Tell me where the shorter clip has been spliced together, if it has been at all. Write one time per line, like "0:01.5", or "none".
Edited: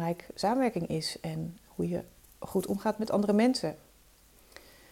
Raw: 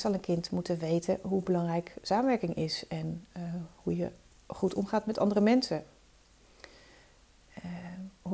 0:01.7